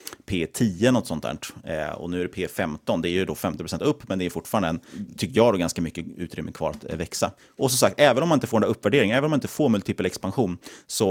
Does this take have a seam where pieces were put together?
no; 0 cuts

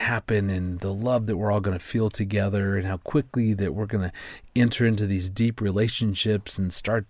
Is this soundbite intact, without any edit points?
yes; 0 cuts

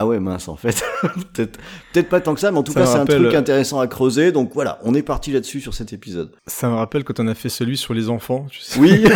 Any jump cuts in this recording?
yes; 1 cut; at 6.4 s

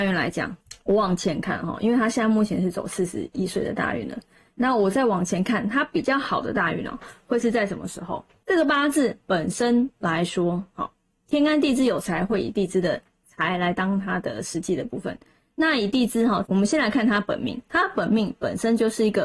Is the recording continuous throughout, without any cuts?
no; 2 cuts; at 8.4 s, 16.5 s

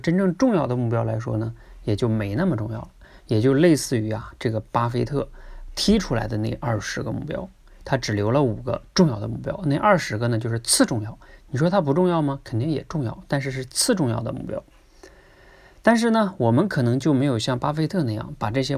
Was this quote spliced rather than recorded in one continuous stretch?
no; 0 cuts

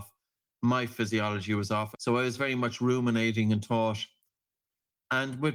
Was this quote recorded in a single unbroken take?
no; 1 cut; at 1.9 s

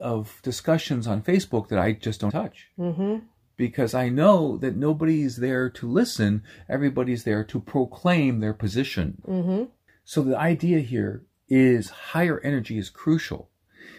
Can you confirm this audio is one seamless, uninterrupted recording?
no; 2 cuts; at 2.3 s, 9.2 s

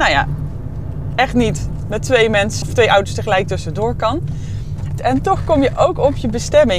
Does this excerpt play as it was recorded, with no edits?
no; 2 cuts; at 2.6 s, 5.0 s

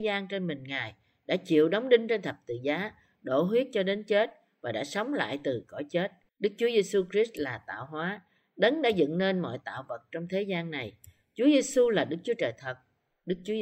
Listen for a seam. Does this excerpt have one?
yes; 1 cut; at 6.3 s

